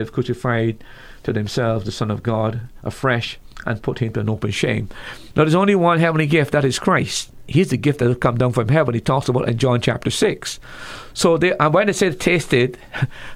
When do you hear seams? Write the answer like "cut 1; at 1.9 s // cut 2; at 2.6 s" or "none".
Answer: cut 1; at 5.3 s